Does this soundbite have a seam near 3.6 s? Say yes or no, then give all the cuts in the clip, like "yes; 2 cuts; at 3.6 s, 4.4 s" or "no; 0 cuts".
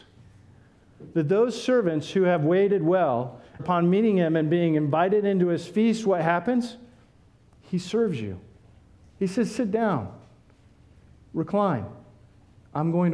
yes; 1 cut; at 3.6 s